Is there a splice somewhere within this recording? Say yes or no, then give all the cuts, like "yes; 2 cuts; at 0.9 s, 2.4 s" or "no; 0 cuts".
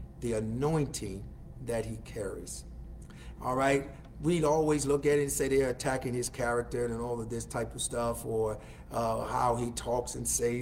yes; 1 cut; at 3.4 s